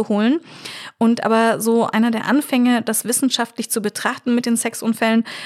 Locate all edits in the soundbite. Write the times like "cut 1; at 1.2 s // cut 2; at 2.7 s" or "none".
none